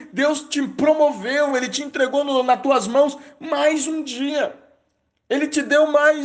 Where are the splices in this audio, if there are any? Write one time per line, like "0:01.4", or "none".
none